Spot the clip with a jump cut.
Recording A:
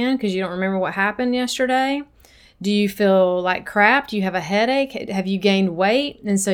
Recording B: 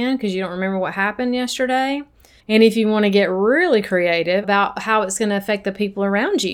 B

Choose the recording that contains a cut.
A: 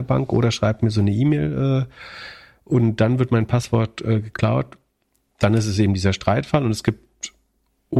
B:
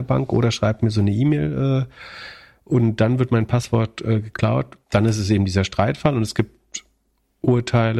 B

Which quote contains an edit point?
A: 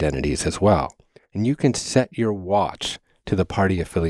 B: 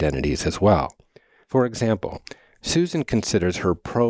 A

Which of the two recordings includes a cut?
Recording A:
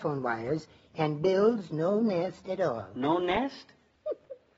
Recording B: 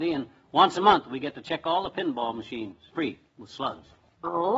B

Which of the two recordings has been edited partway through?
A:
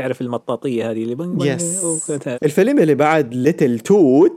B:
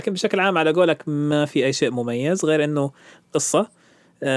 A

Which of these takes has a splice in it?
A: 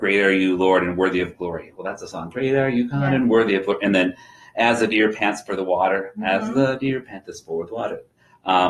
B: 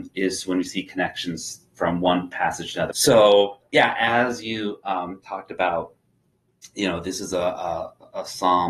B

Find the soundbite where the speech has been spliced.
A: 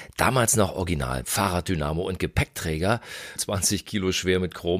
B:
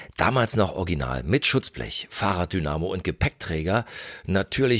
A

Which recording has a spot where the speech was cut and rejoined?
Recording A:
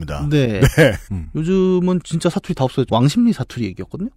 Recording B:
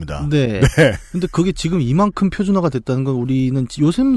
A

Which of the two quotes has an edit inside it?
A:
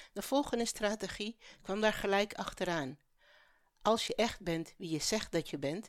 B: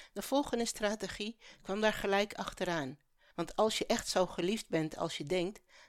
B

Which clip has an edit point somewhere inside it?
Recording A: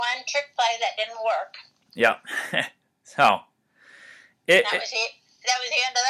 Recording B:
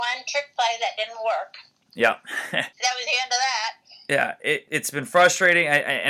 B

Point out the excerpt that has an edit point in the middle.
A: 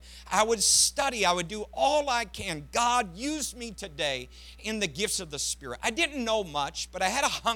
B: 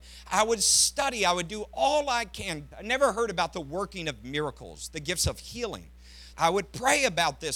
B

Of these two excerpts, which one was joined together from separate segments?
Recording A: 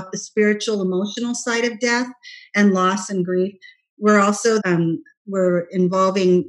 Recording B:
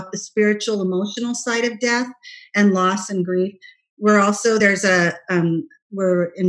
A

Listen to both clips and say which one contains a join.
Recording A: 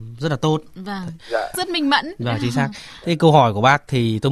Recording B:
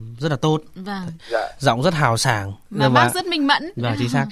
A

